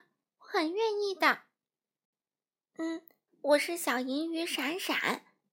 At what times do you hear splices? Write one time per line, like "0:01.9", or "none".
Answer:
0:03.3